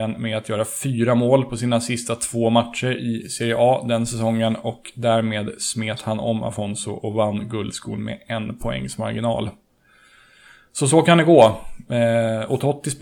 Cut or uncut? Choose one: uncut